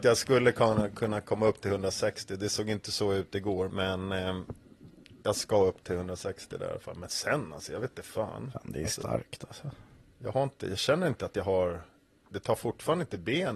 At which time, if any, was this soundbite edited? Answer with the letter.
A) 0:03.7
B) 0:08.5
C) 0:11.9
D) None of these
A